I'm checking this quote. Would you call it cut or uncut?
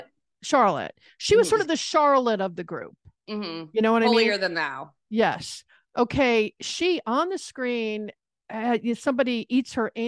uncut